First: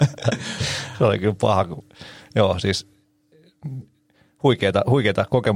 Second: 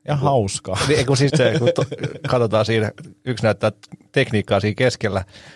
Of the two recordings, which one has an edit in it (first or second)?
second